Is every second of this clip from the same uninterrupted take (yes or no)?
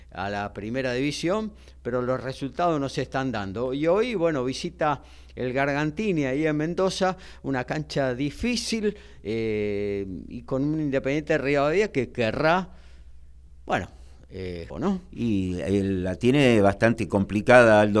no